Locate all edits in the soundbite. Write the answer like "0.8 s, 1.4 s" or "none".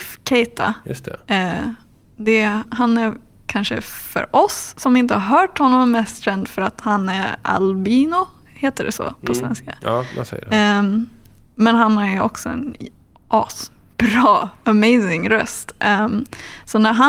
2.6 s